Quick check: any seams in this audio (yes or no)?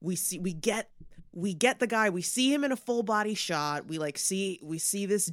no